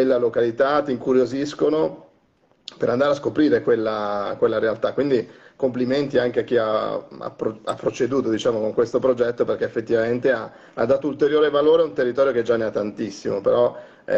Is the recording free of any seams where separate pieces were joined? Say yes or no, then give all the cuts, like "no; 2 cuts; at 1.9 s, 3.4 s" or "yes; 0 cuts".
yes; 0 cuts